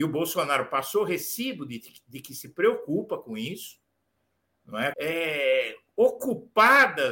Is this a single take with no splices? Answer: no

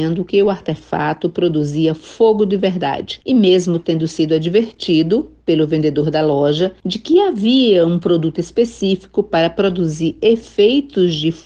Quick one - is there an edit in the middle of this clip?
no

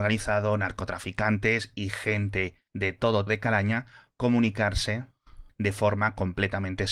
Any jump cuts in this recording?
yes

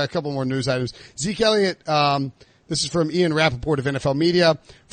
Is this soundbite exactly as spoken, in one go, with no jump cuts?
yes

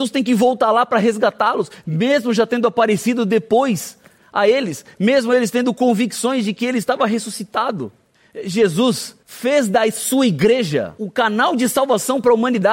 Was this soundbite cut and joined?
no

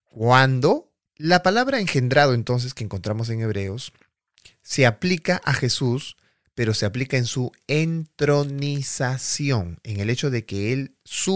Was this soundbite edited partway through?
yes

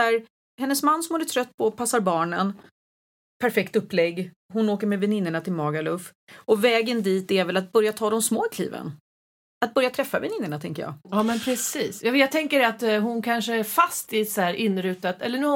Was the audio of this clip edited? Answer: no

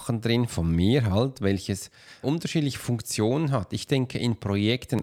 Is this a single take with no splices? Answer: no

